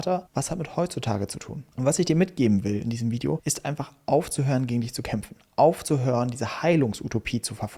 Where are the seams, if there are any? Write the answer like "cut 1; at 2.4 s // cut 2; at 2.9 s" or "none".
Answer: none